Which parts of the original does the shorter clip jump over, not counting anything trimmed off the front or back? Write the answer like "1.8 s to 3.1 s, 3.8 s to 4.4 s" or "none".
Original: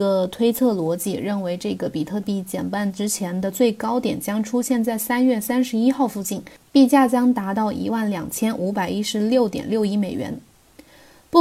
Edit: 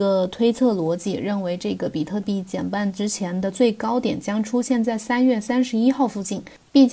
none